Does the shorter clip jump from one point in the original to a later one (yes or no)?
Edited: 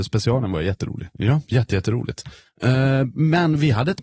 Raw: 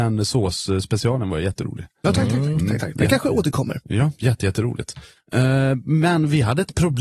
yes